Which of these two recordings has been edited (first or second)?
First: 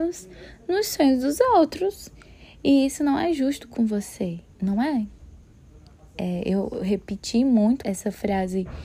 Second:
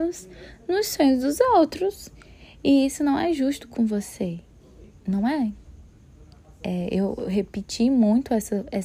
first